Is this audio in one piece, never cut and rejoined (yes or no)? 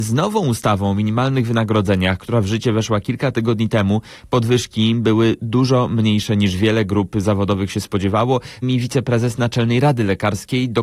no